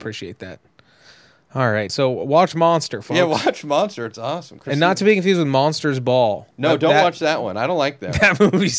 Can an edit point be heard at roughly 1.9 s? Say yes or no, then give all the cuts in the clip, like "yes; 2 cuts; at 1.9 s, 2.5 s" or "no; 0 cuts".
yes; 1 cut; at 1.9 s